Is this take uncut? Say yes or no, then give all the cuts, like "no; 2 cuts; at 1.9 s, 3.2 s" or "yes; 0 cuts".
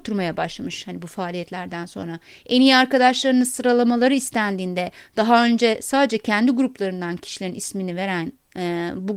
yes; 0 cuts